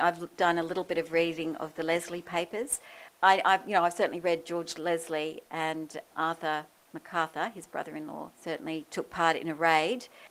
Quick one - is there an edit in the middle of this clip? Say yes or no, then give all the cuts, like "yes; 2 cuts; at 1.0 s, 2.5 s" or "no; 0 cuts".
yes; 1 cut; at 8.3 s